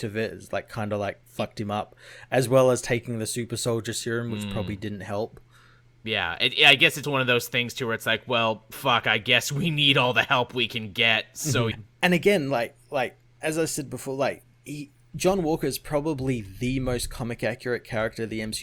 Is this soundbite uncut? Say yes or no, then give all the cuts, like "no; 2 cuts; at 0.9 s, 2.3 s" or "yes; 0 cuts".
no; 2 cuts; at 7.0 s, 11.7 s